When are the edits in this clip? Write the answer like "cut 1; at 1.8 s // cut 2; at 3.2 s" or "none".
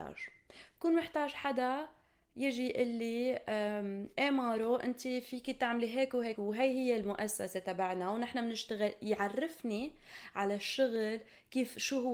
cut 1; at 6.4 s